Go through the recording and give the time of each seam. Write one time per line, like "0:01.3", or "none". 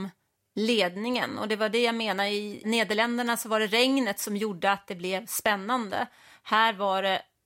0:02.6